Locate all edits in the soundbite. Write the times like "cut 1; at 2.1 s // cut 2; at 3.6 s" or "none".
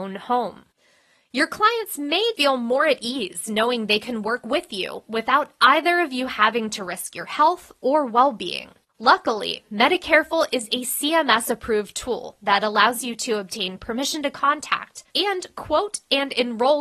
cut 1; at 2.3 s // cut 2; at 8.9 s // cut 3; at 15.1 s